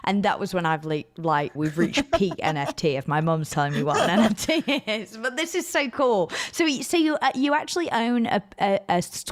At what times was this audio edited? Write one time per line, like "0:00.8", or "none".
0:01.6

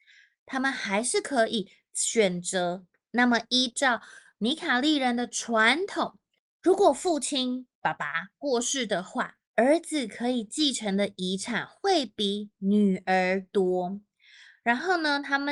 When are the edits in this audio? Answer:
0:02.9
0:09.5

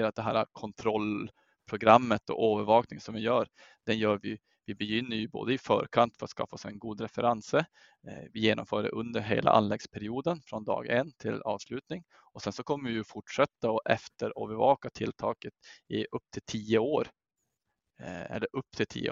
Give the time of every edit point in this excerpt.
none

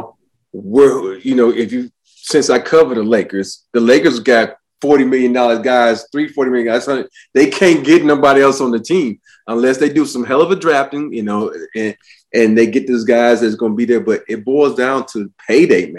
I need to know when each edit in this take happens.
none

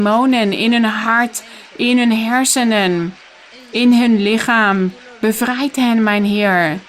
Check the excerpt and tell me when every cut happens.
none

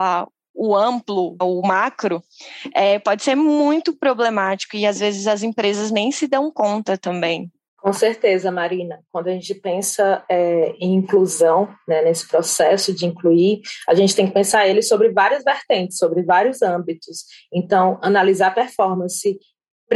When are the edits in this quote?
none

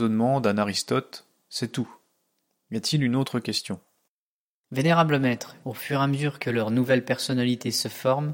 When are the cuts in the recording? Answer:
0:05.6

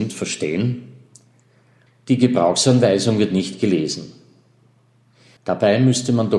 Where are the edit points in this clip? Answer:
0:01.9
0:05.4

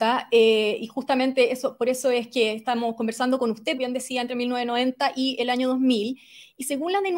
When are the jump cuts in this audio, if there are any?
0:03.8

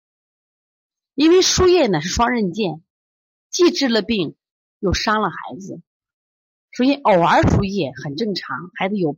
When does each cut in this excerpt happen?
0:07.4

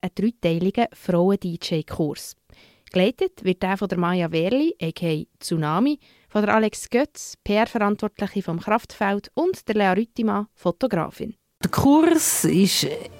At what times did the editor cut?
0:11.5

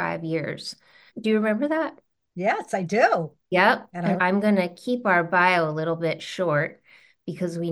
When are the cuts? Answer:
0:01.1
0:04.2

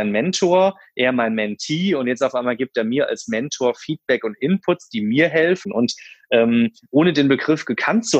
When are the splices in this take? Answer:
0:05.6

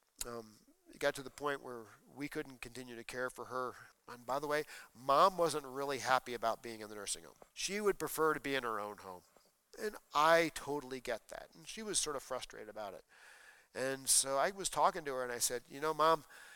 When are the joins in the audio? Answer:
0:03.9
0:07.5

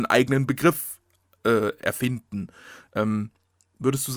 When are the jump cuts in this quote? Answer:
0:02.9

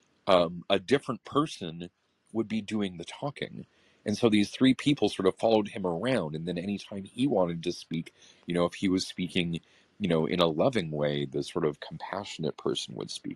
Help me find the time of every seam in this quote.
none

